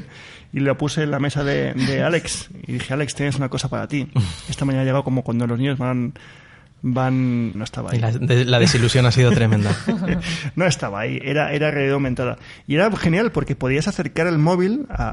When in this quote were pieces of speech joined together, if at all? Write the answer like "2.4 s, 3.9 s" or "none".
7.5 s